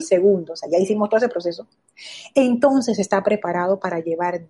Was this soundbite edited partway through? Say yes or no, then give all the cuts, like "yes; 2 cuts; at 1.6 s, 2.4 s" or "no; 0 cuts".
no; 0 cuts